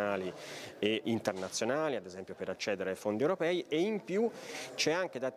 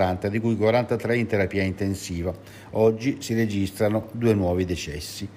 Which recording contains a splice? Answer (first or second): first